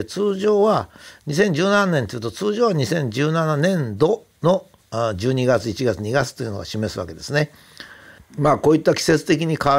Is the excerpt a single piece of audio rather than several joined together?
no; 2 cuts; at 4.8 s, 8.2 s

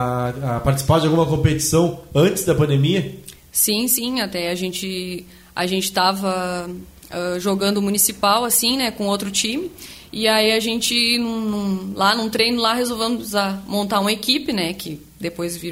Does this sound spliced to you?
no; 0 cuts

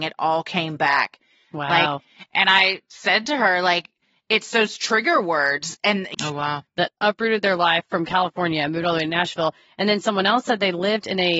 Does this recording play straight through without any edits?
no; 1 cut; at 6.1 s

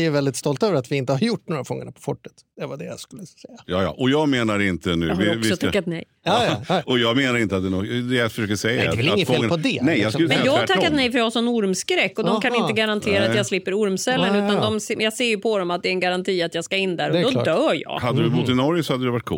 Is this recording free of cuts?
yes; 0 cuts

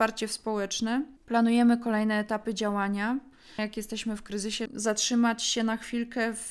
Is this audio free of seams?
no; 3 cuts; at 1.2 s, 3.6 s, 4.7 s

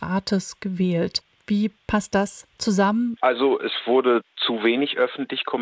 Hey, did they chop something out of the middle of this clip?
yes; 1 cut; at 3.2 s

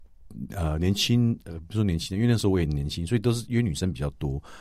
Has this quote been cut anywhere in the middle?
no; 0 cuts

